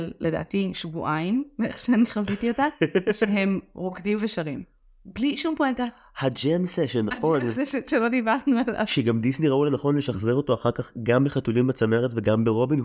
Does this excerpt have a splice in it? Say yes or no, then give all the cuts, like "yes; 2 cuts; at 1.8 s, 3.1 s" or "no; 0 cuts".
no; 0 cuts